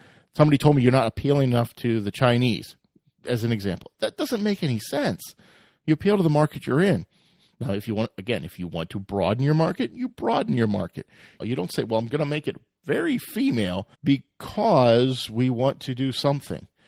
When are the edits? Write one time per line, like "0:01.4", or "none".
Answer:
0:11.4
0:13.9